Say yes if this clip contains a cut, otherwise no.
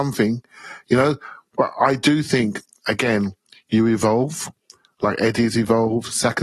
no